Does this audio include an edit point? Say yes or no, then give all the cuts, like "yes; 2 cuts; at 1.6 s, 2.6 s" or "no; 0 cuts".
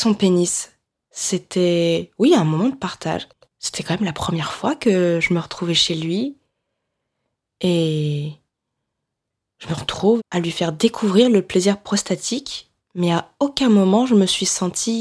yes; 2 cuts; at 3.4 s, 10.2 s